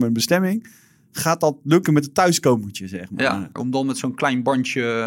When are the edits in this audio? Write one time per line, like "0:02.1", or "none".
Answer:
0:03.6